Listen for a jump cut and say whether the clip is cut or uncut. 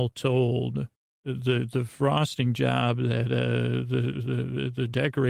cut